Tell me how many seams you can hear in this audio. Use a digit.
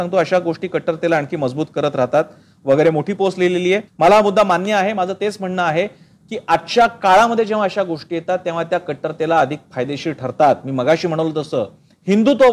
1